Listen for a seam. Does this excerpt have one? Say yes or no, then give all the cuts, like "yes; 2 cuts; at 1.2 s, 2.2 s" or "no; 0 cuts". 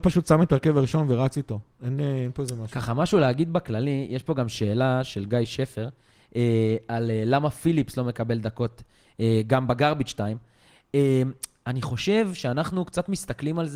no; 0 cuts